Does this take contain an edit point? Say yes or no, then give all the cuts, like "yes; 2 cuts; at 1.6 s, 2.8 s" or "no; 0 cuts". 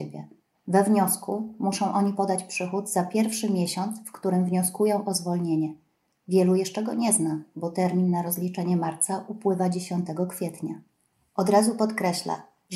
no; 0 cuts